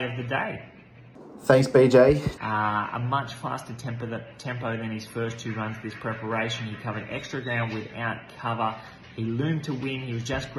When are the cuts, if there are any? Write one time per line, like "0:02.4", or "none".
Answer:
0:02.4